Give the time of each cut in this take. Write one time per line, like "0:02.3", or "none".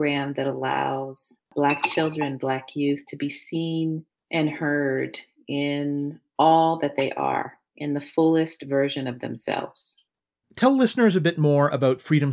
0:10.4